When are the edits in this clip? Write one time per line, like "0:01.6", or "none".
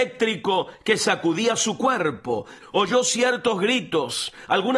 0:02.6